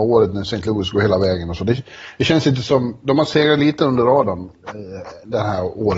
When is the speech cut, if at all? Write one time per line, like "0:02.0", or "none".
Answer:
none